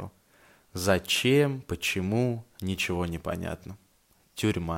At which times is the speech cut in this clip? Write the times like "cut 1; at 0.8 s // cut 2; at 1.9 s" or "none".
none